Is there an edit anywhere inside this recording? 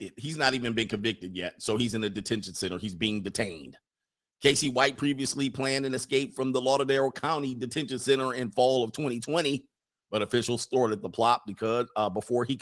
no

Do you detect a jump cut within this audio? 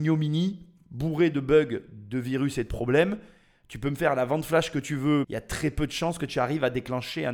yes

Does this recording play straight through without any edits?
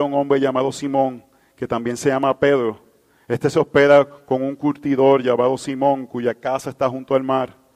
yes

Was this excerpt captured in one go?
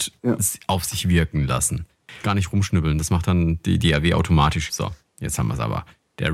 no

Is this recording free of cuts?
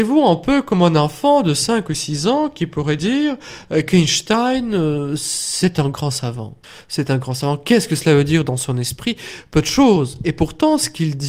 yes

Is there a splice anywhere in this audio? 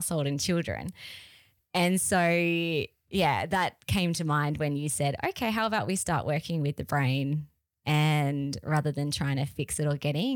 no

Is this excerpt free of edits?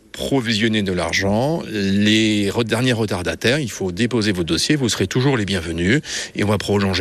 yes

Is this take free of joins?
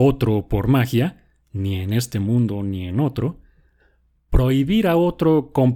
yes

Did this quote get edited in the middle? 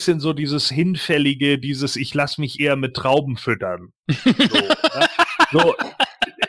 no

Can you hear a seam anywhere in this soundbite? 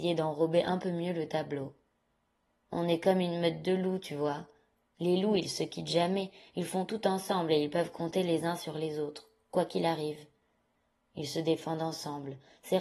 no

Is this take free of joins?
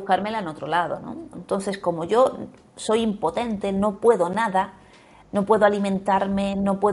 no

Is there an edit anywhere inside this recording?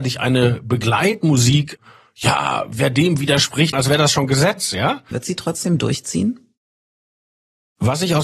yes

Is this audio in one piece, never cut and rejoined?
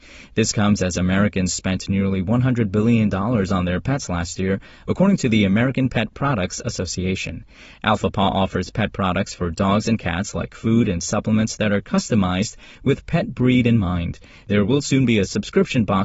yes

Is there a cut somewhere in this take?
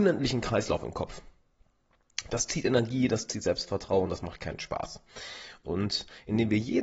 yes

